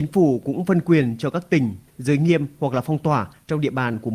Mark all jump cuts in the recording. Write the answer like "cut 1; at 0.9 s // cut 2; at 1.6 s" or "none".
cut 1; at 1.9 s